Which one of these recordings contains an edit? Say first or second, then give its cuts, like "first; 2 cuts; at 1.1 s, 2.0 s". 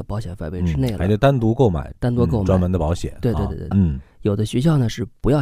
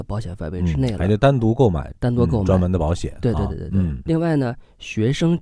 first; 1 cut; at 3.7 s